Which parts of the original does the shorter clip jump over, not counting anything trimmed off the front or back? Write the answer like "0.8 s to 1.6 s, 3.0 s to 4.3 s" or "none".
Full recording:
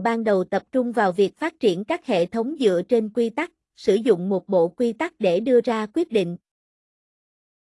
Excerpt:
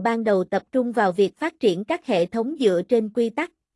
none